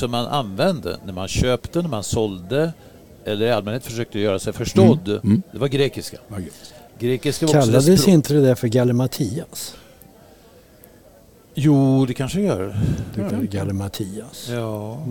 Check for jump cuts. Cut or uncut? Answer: cut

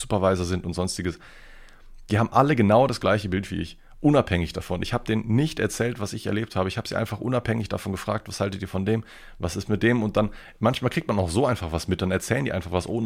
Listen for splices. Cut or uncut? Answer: uncut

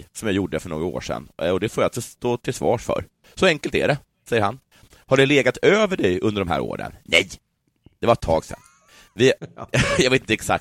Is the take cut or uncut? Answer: uncut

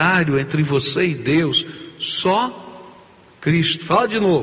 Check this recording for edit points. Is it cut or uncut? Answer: uncut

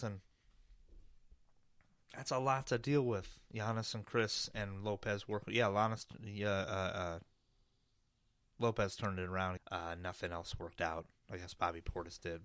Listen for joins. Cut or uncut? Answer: cut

